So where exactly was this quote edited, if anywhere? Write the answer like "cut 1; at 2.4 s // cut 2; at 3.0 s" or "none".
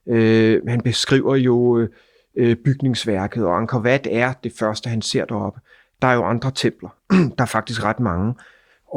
none